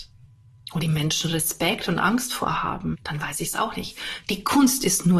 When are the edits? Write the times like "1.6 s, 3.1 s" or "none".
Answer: 2.9 s

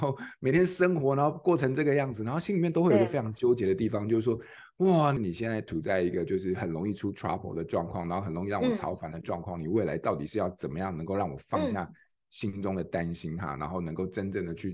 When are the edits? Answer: none

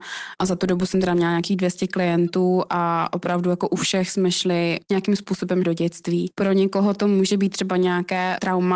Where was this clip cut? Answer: none

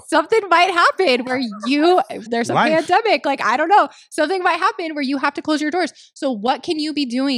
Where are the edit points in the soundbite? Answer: 2.3 s

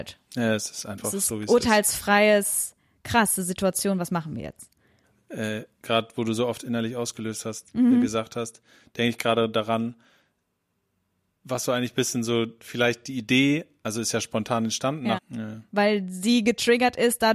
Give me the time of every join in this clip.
15.2 s

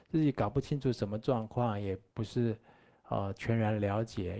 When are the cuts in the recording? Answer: none

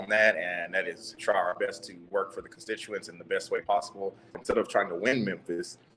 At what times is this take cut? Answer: 4.3 s

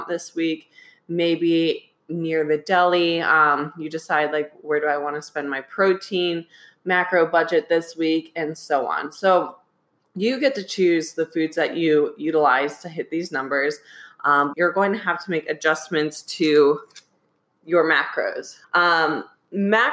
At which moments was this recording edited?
14.5 s, 18.6 s

